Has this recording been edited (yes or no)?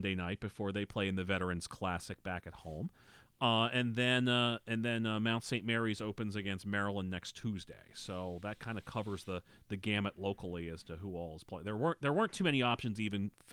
no